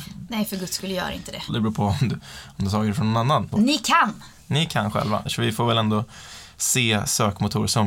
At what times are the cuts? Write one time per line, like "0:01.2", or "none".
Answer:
0:01.5
0:03.5
0:05.3